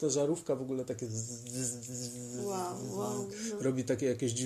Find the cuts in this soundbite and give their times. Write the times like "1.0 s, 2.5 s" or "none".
none